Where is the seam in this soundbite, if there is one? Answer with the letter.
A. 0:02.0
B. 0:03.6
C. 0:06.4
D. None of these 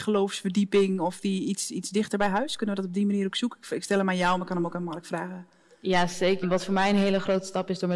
C